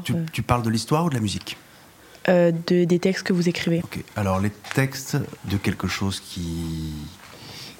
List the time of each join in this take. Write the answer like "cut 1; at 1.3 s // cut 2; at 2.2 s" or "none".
cut 1; at 3.8 s // cut 2; at 5.4 s